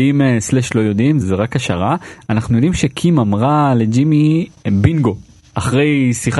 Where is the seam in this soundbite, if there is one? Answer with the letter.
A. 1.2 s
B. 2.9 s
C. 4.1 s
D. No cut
A